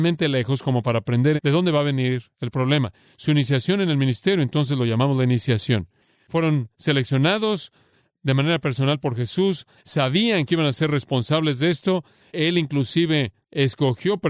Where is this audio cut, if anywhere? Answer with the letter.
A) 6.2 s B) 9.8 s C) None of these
B